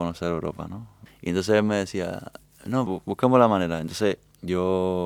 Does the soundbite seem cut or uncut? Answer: cut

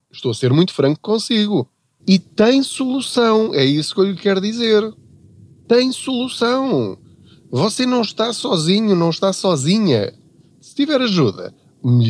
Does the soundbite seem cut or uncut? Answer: cut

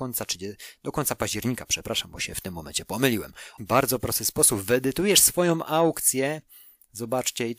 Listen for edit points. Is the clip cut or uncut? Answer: cut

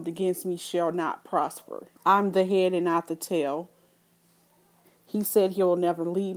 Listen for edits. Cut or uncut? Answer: cut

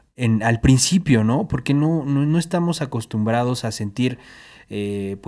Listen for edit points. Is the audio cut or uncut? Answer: uncut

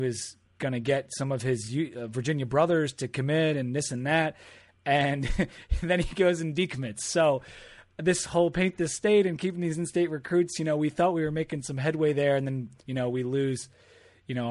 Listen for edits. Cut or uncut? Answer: uncut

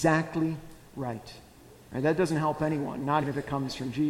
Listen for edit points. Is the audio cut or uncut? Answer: cut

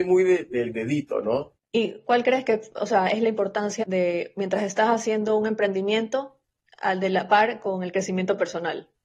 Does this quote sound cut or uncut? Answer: cut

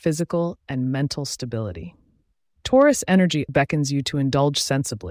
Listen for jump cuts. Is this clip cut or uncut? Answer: cut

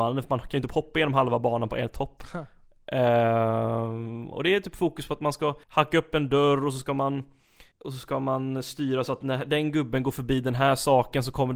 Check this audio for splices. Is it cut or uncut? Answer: cut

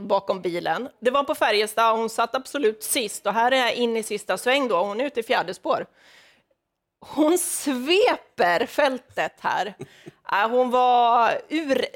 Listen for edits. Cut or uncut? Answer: uncut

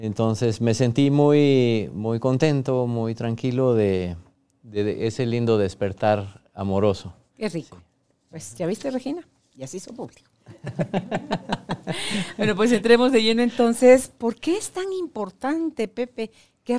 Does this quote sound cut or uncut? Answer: uncut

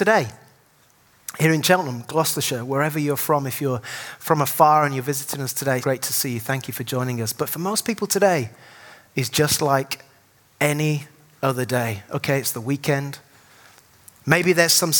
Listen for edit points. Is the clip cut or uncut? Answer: cut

